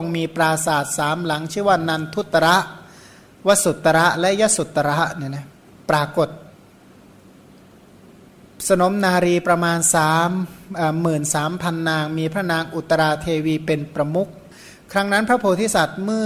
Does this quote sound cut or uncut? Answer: uncut